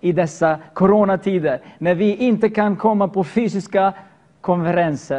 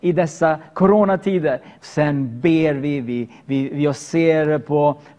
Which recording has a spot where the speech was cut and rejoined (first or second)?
second